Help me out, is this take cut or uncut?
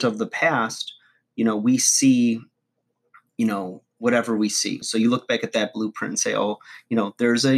cut